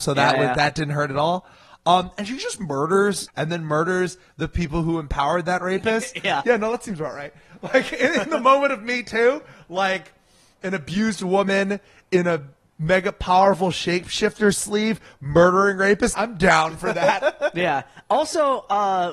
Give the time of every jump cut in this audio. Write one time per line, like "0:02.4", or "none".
0:03.3
0:06.4
0:16.1